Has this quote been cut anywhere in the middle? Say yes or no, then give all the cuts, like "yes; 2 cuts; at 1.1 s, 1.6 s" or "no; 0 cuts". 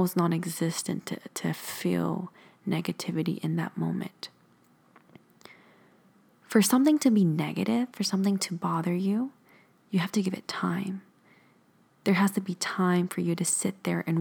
no; 0 cuts